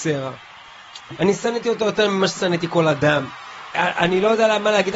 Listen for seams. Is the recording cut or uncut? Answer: cut